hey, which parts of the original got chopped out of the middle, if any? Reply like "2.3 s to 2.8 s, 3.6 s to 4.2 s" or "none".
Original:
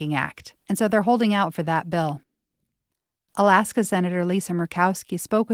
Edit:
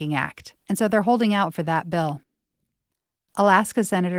none